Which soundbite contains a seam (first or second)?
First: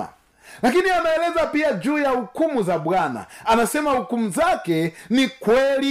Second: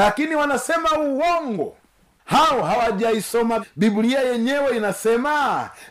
second